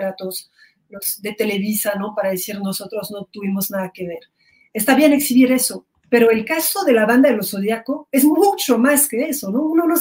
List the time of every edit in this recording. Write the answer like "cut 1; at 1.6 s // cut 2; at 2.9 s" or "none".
none